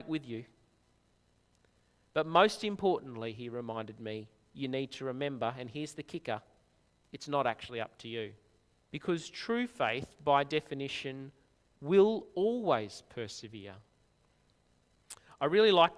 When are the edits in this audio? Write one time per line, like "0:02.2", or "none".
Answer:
0:08.7